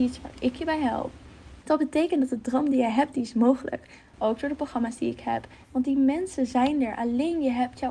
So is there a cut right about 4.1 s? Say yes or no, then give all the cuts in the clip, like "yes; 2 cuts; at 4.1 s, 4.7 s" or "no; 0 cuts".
yes; 3 cuts; at 1.6 s, 4.1 s, 5.6 s